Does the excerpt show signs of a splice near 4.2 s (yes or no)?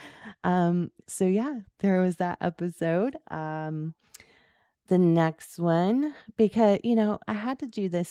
no